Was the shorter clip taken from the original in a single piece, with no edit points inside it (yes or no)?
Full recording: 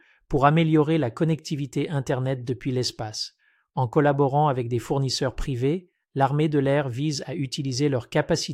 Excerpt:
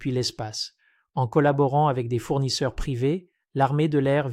yes